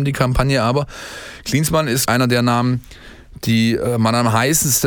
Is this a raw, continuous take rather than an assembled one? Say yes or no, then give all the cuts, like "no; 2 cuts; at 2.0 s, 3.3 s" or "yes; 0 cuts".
no; 1 cut; at 2.1 s